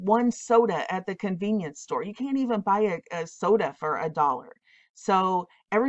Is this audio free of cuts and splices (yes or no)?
yes